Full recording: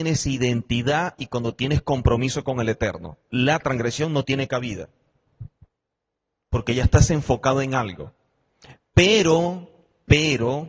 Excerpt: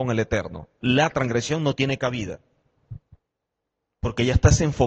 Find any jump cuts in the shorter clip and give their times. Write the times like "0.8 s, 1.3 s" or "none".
none